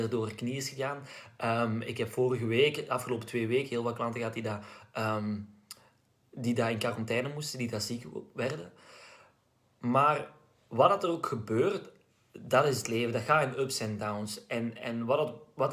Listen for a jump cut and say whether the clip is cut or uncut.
uncut